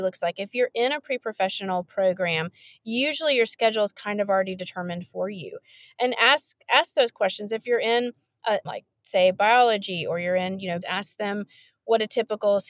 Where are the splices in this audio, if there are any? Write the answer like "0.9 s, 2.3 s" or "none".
8.6 s, 10.8 s